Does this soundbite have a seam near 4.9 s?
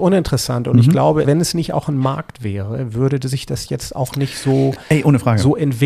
no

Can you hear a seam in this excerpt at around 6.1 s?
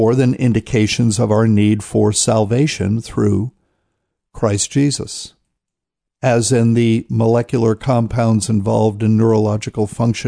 yes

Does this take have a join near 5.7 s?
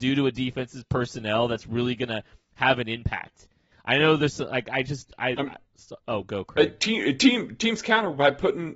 yes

